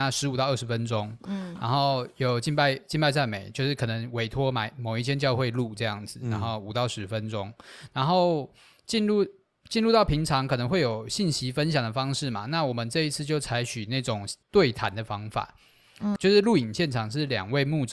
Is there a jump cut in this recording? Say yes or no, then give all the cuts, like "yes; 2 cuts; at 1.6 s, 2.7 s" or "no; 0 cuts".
yes; 2 cuts; at 14.4 s, 16.2 s